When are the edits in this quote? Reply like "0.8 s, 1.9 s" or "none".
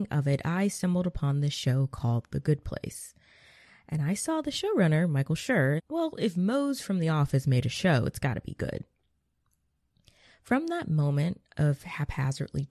5.8 s